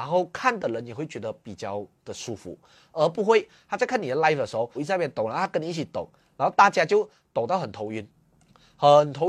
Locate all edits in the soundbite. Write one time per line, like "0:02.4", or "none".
0:04.7